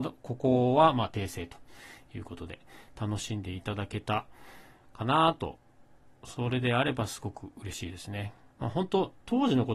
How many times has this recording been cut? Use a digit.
1